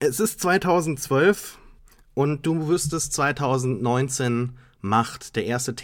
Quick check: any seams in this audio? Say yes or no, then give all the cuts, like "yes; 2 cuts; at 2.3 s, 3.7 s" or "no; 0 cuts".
no; 0 cuts